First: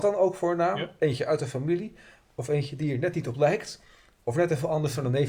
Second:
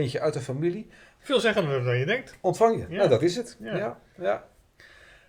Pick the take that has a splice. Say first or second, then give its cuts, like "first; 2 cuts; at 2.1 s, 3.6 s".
second; 1 cut; at 1.2 s